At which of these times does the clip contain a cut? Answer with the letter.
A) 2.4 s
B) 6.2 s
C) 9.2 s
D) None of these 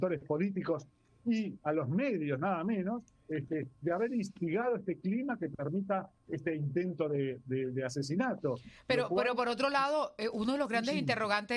B